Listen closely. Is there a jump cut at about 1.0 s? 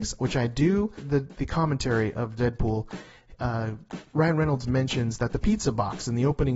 yes; 1 cut; at 1.0 s

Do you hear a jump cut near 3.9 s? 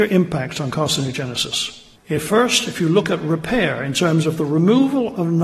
no; 1 cut; at 2.0 s

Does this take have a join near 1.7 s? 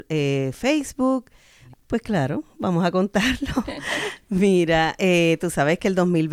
yes; 1 cut; at 1.7 s

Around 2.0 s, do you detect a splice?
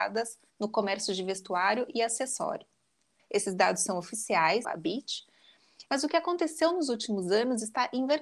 no; 3 cuts; at 3.2 s, 4.6 s, 5.9 s

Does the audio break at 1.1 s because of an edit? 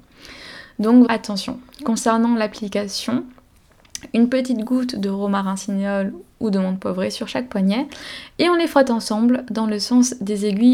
yes; 1 cut; at 1.1 s

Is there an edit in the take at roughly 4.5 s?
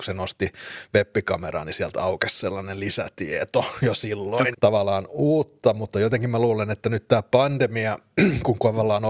yes; 1 cut; at 4.5 s

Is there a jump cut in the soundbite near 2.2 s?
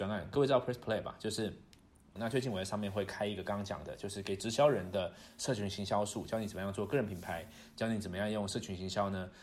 yes; 1 cut; at 2.2 s

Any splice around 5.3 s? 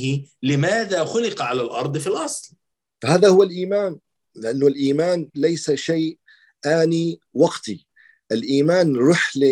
yes; 1 cut; at 5.3 s

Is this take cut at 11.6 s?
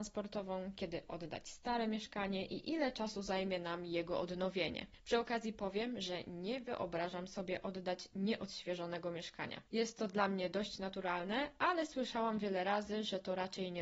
no; 1 cut; at 9.7 s

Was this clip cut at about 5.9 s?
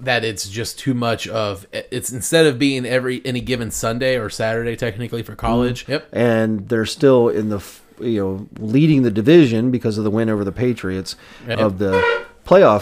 yes; 2 cuts; at 5.9 s, 11.5 s

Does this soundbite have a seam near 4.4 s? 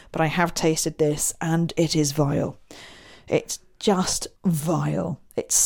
yes; 1 cut; at 4.4 s

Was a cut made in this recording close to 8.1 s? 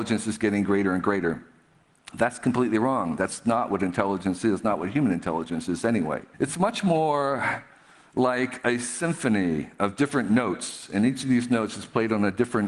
no; 1 cut; at 6.3 s

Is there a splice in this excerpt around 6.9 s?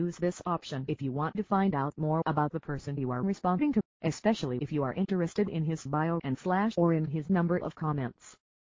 no; 1 cut; at 3.9 s

